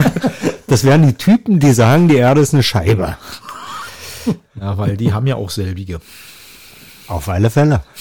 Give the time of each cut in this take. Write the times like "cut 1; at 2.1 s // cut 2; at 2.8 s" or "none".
none